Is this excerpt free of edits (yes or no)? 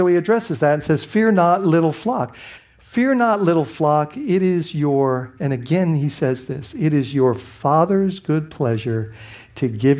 no